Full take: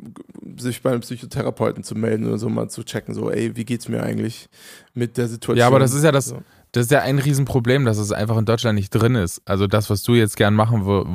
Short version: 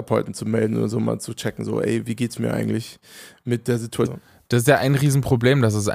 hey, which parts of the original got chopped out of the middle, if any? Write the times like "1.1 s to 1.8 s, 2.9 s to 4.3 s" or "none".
5.5 s to 6.3 s

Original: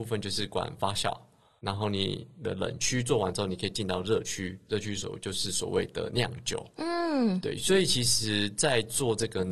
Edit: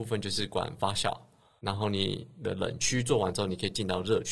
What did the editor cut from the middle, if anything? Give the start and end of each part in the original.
none

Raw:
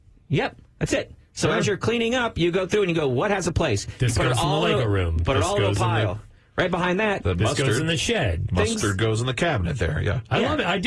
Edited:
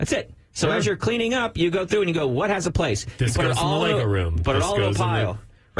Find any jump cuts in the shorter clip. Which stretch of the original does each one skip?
none

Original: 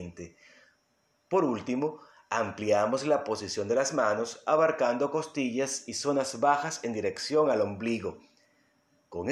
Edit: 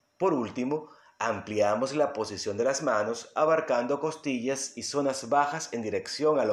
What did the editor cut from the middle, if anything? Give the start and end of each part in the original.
none

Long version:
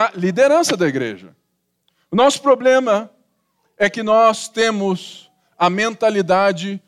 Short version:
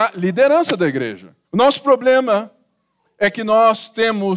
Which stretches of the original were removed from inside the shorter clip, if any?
1.4 s to 2.0 s

